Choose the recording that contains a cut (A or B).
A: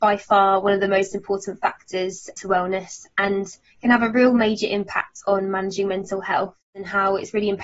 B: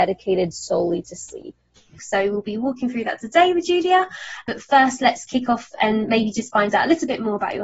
B